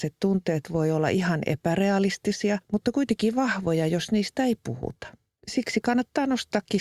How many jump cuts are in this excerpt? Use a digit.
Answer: 0